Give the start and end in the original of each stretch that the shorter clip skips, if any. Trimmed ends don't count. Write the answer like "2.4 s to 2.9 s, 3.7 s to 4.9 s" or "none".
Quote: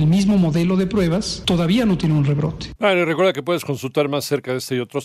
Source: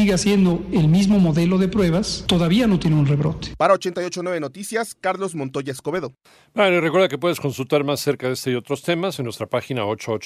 3.6 s to 6.5 s